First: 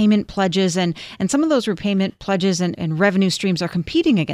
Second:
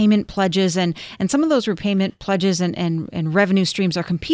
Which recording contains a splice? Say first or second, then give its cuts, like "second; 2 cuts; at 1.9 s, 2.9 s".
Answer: first; 1 cut; at 2.7 s